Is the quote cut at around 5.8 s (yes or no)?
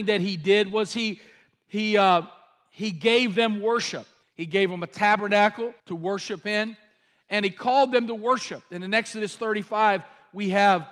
yes